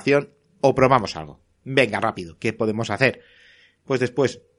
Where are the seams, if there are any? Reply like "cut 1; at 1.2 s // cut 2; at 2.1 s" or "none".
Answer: none